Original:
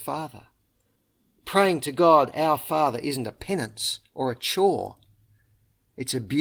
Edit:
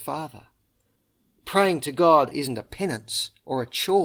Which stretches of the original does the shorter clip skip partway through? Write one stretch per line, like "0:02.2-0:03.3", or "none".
0:02.3-0:03.0